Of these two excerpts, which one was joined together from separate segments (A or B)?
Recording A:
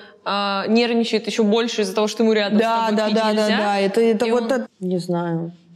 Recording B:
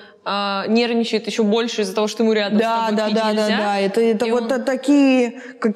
A